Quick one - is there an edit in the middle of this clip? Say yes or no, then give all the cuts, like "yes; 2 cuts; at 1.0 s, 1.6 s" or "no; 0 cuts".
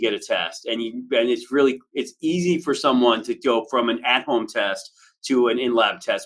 no; 0 cuts